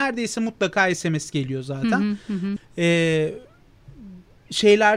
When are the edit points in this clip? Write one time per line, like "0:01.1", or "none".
0:02.6